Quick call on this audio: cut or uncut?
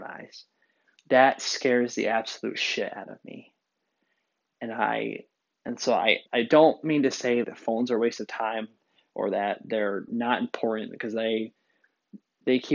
cut